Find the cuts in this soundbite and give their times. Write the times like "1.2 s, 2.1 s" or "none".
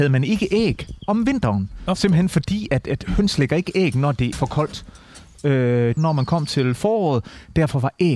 4.3 s, 6.0 s